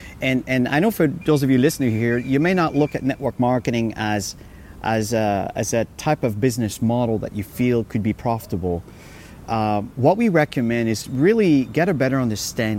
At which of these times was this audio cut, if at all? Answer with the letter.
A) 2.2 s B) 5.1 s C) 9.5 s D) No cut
D